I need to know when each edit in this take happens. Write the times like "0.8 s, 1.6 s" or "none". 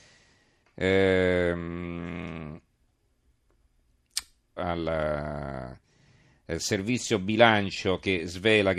4.6 s

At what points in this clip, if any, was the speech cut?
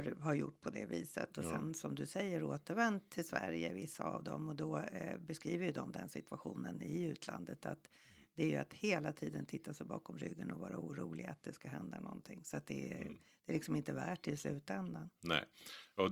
none

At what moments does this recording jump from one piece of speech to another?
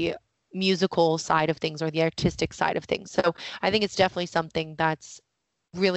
none

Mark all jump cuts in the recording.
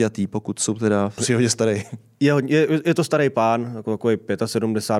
1.2 s

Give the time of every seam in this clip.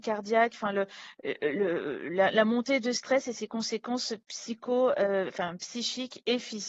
none

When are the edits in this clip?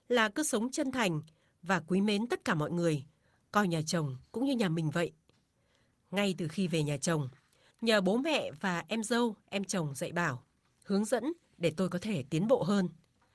7.7 s

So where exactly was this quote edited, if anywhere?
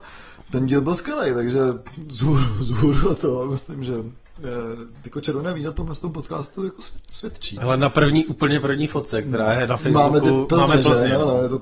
7.6 s

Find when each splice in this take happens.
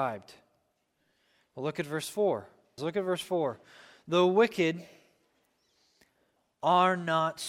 2.8 s

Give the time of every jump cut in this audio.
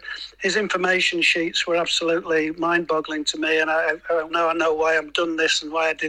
4.3 s

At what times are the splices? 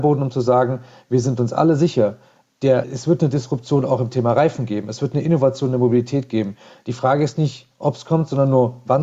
2.8 s

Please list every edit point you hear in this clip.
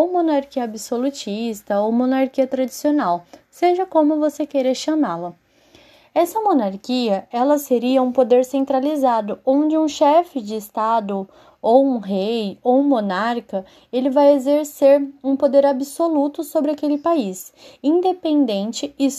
none

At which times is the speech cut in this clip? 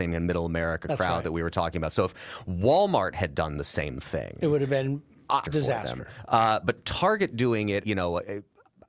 5.4 s, 7.8 s

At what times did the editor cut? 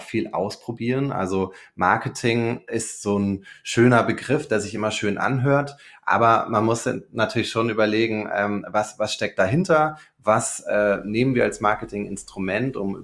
none

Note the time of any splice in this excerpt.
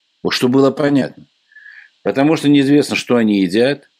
none

